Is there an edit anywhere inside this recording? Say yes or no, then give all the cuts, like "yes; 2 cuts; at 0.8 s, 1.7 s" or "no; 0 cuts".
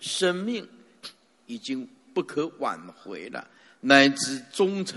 no; 0 cuts